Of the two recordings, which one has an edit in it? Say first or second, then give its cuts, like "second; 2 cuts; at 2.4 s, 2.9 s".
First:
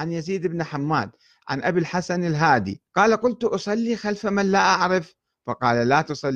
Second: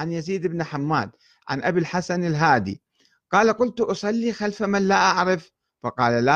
first; 1 cut; at 2.9 s